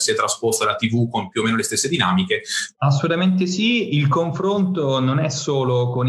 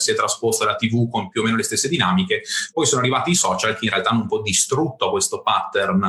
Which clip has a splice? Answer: first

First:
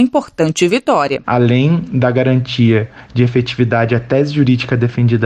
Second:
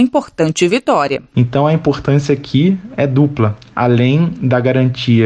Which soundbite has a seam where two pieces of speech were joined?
first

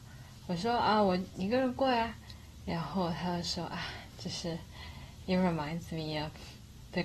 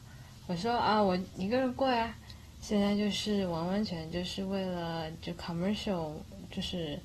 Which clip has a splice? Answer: second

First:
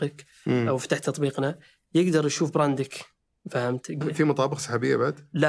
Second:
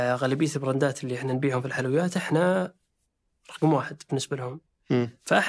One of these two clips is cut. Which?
first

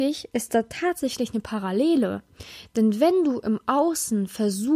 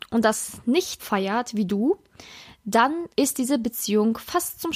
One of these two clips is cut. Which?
second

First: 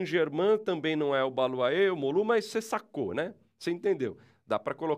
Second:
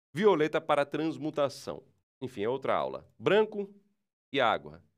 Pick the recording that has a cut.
second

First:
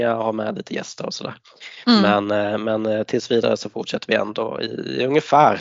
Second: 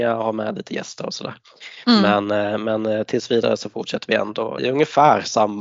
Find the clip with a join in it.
second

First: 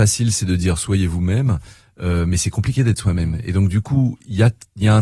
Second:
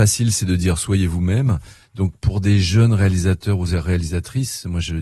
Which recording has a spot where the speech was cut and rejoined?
second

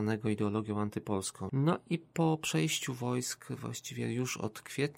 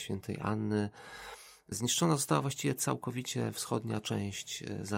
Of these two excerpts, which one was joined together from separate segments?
first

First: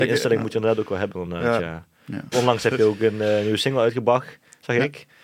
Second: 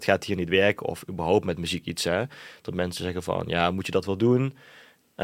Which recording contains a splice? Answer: first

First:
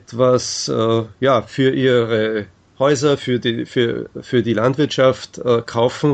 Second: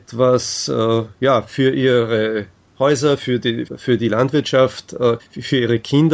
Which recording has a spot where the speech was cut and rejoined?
second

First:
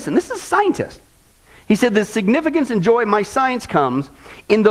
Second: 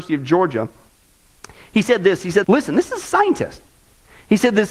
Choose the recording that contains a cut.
second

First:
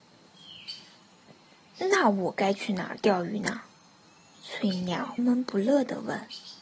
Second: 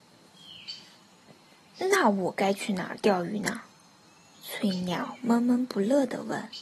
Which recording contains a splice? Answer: first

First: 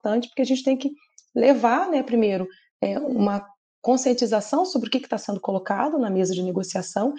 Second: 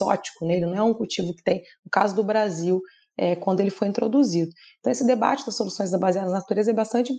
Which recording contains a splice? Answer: second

